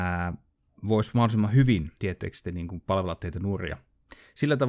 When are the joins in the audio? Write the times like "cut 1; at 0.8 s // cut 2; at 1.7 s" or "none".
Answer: cut 1; at 2.0 s